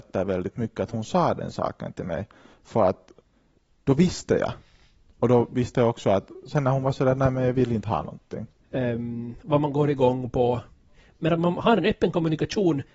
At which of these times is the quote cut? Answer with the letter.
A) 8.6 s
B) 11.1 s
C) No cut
A